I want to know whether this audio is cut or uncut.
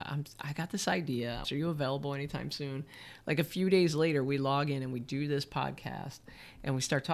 cut